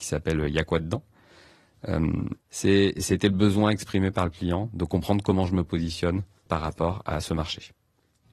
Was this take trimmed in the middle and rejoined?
yes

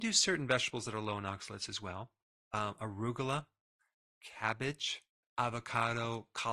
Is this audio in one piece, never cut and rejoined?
yes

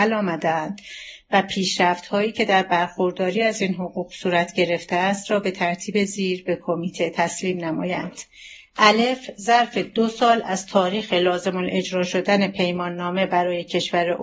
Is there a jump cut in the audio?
no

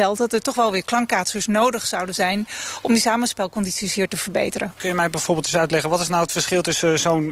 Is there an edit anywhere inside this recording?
yes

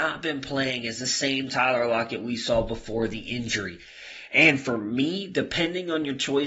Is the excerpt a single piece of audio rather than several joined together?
yes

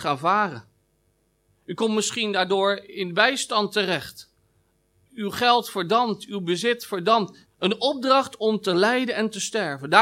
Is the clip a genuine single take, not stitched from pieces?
no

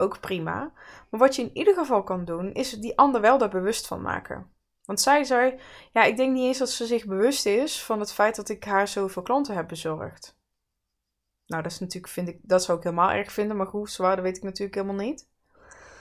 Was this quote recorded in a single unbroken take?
yes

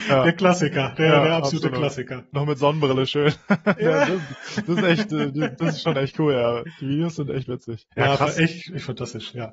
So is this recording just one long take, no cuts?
no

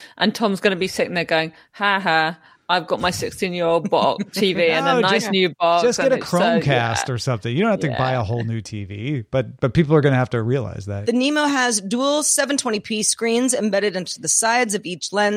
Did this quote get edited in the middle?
yes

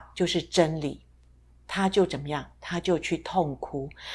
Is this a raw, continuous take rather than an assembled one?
yes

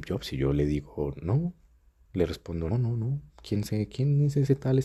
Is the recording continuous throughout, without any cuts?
no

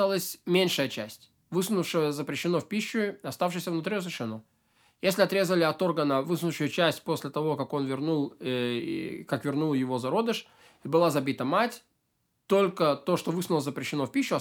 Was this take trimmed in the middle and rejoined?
no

